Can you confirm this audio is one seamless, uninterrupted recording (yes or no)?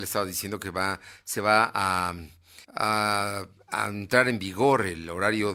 no